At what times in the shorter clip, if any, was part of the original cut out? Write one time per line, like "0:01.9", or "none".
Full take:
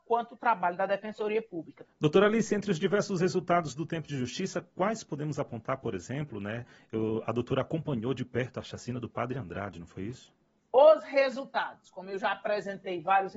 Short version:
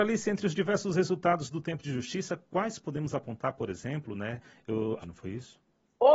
0:05.0